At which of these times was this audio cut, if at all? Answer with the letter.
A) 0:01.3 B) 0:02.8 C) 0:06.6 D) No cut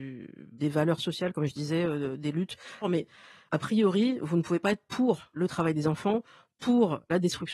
B